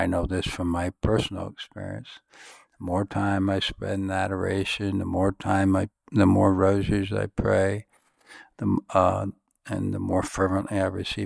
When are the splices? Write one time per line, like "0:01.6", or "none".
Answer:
none